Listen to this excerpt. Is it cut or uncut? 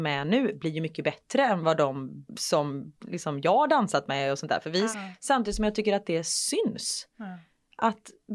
cut